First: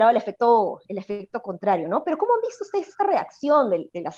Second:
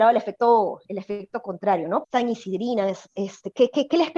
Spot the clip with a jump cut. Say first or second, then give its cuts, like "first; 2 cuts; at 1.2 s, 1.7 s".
second; 1 cut; at 2.0 s